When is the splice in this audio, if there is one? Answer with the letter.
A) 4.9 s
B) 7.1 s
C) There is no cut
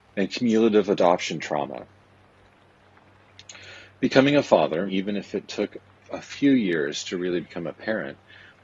A